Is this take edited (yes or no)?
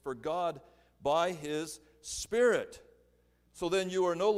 yes